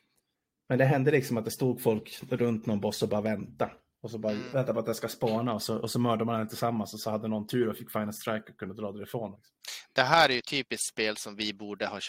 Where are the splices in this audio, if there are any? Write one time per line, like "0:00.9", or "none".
0:04.5
0:09.3